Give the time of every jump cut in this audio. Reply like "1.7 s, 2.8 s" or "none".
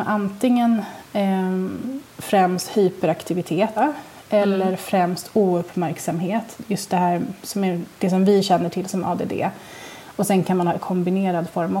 2.1 s, 3.8 s